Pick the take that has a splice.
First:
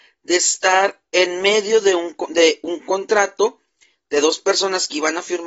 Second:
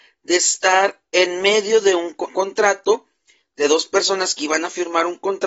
second; 1 cut; at 2.3 s

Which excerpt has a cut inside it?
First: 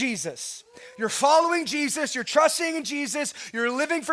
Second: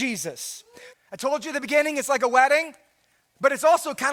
second; 1 cut; at 0.9 s

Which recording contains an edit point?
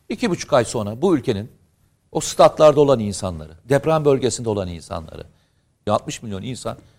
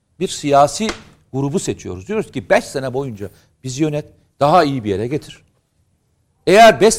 first; 1 cut; at 5.9 s

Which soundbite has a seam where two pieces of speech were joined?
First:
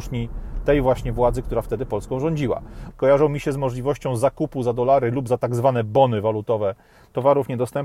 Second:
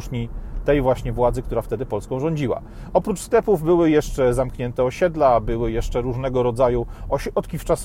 first; 1 cut; at 2.9 s

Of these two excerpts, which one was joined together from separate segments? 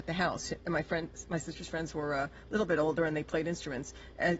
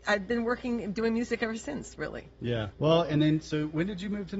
second; 1 cut; at 2.7 s

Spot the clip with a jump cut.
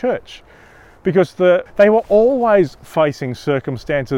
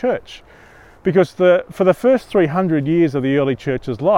first; 1 cut; at 1.7 s

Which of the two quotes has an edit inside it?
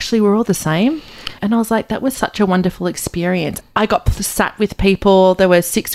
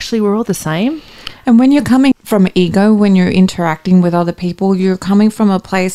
first; 2 cuts; at 1.4 s, 3.6 s

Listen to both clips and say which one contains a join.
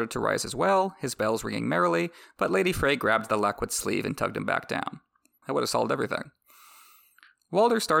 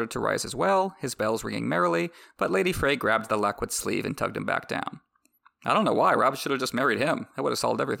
first; 1 cut; at 5.4 s

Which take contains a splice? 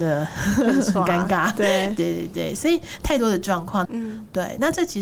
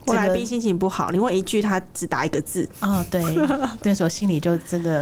first; 1 cut; at 3.8 s

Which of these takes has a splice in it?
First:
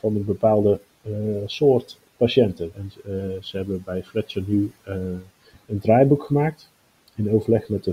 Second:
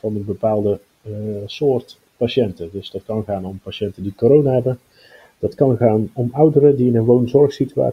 first; 1 cut; at 2.7 s

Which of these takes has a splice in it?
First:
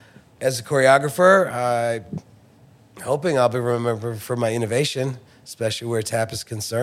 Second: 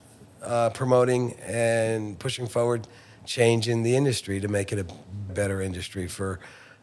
second; 1 cut; at 5.3 s

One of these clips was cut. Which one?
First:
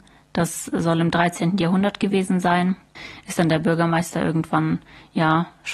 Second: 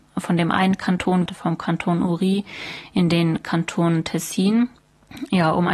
second; 1 cut; at 1.3 s

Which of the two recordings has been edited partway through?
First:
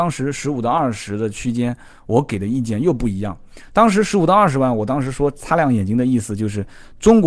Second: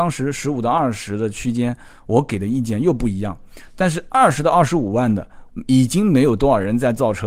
second; 2 cuts; at 3.7 s, 5.5 s

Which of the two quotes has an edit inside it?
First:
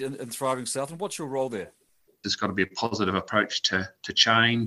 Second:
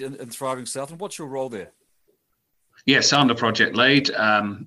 first; 1 cut; at 2.2 s

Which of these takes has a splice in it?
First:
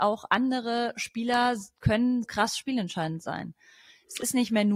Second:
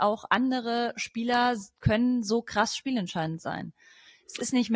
first; 1 cut; at 2.2 s

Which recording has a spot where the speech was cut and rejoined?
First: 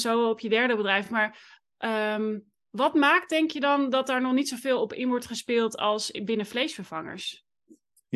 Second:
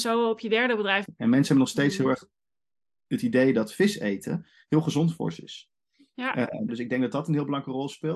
second; 2 cuts; at 1.1 s, 6.7 s

